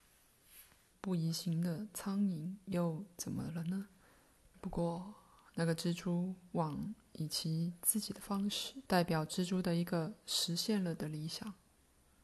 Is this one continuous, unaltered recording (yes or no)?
no